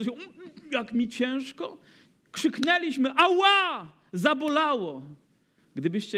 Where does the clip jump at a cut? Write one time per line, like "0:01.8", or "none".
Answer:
none